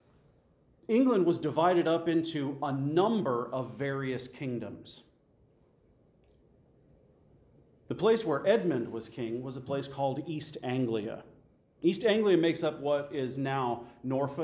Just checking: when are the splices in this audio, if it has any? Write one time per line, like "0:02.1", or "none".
none